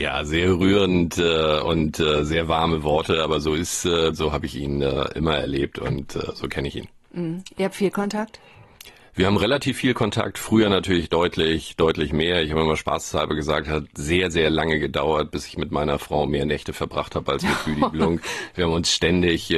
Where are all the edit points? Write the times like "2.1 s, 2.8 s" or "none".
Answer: 4.1 s